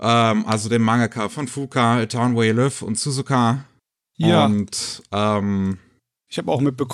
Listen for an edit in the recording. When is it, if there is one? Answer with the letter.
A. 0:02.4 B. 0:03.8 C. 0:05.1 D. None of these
D